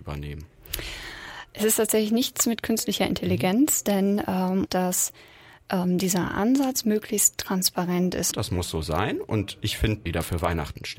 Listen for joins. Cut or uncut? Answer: cut